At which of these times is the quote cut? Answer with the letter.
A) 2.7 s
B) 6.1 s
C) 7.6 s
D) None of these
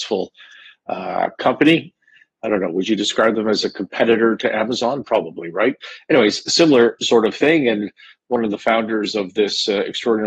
D